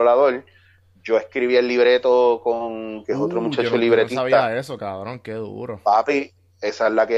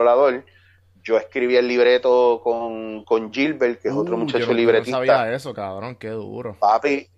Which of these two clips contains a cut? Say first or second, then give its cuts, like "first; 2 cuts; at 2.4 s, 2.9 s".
first; 1 cut; at 3.0 s